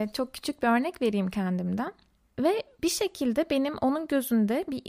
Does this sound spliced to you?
yes; 1 cut; at 2.3 s

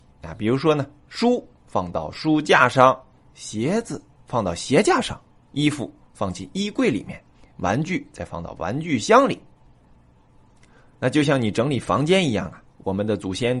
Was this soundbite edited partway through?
no; 0 cuts

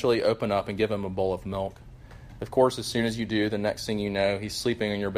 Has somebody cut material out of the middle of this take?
no; 0 cuts

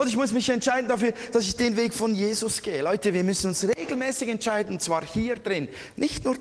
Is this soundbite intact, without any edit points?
yes; 0 cuts

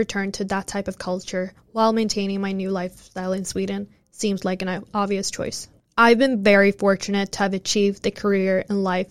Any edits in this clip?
no; 0 cuts

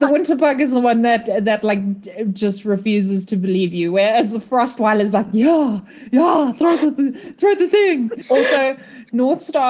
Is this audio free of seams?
yes; 0 cuts

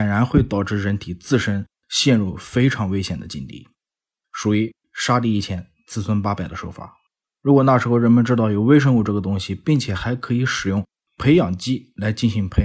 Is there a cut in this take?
yes; 1 cut; at 7.3 s

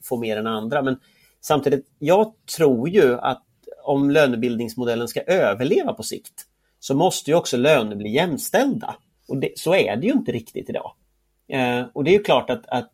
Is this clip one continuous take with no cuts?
no; 1 cut; at 9.2 s

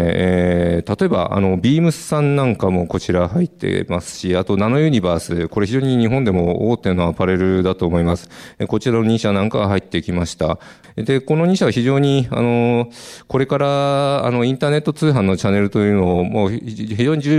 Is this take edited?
no; 0 cuts

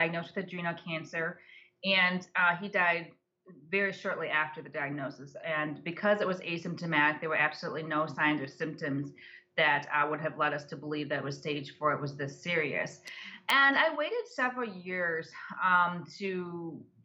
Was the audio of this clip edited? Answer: no; 0 cuts

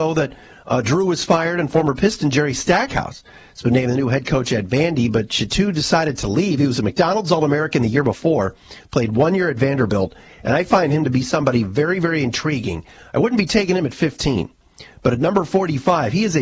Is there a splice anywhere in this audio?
no; 0 cuts

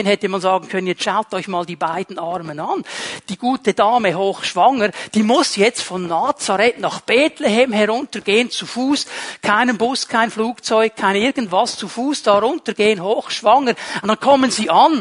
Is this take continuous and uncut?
no; 1 cut; at 14.0 s

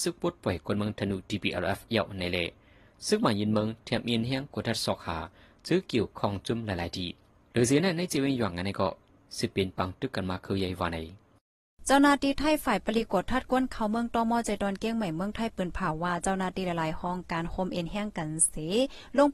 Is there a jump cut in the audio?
no; 0 cuts

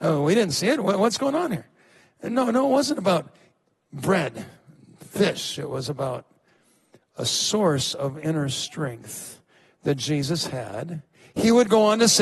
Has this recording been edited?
no; 0 cuts

